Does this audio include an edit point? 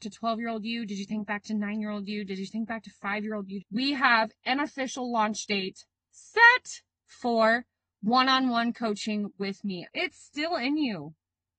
yes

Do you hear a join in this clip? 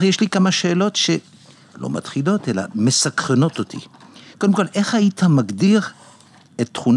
no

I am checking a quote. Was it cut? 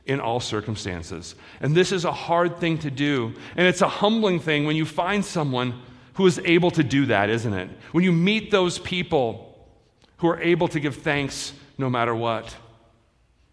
no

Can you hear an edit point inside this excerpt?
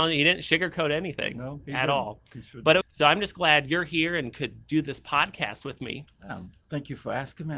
yes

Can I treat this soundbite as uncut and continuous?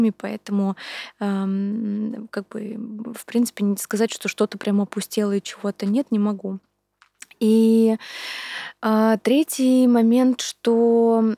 yes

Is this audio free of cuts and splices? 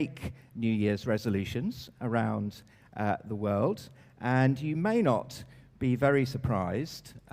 yes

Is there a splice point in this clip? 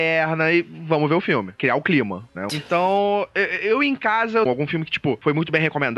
yes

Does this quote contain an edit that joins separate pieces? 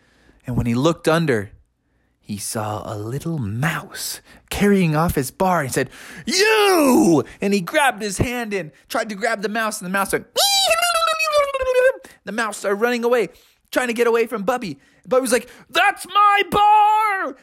no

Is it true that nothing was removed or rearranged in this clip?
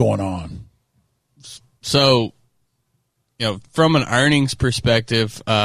yes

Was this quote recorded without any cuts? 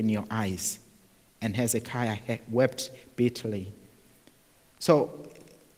yes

